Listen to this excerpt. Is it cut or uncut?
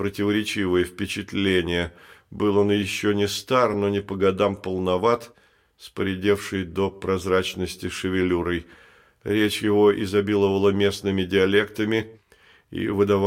uncut